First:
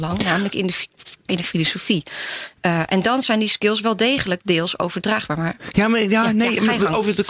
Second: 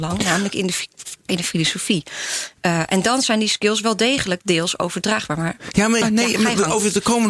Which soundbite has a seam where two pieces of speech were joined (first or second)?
second